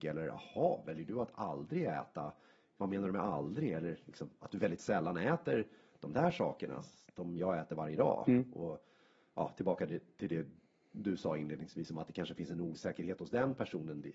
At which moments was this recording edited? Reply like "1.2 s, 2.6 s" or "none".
none